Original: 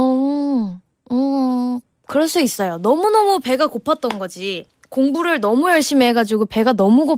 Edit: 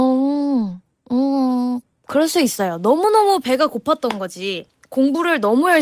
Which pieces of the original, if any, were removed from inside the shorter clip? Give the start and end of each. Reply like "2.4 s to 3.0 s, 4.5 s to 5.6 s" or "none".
none